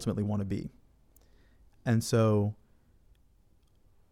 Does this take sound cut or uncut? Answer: cut